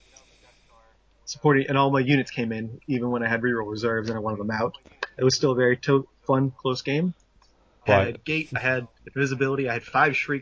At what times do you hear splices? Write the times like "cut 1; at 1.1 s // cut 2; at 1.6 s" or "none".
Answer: cut 1; at 5.2 s // cut 2; at 7.9 s